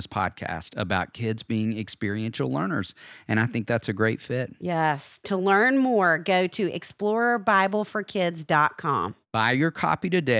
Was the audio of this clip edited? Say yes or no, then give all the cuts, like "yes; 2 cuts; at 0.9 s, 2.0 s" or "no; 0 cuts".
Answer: yes; 1 cut; at 9.2 s